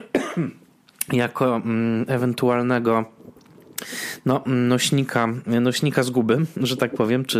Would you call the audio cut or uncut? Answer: uncut